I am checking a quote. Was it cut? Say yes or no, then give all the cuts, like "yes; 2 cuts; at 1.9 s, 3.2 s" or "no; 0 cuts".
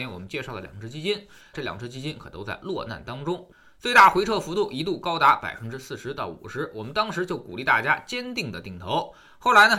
yes; 1 cut; at 1.5 s